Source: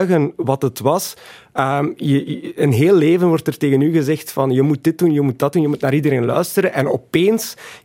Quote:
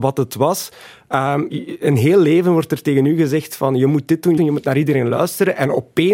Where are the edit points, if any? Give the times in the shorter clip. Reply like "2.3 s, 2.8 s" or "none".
1.5 s, 4.4 s